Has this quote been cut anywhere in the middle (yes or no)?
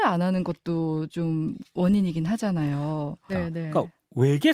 yes